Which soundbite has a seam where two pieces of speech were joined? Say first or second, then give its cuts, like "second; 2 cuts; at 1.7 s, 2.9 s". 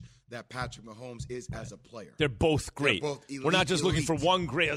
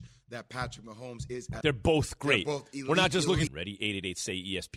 second; 2 cuts; at 1.6 s, 3.5 s